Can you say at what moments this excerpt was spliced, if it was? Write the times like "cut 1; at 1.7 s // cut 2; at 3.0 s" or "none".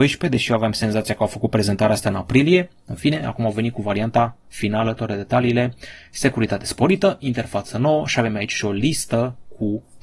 none